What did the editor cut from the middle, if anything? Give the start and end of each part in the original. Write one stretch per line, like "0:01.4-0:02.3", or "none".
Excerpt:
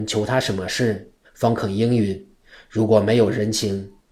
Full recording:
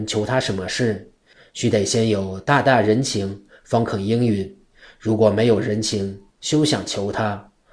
0:01.2-0:03.5